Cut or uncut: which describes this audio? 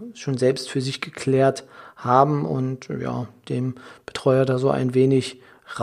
uncut